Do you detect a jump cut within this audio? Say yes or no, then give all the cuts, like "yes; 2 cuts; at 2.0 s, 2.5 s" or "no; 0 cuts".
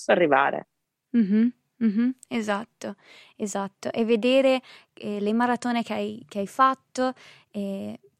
no; 0 cuts